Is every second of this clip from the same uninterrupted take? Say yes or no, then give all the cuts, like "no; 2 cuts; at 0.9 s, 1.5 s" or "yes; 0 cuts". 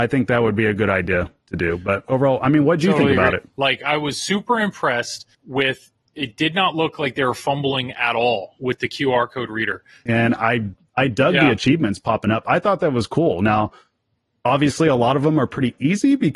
no; 3 cuts; at 3.5 s, 5.3 s, 10.1 s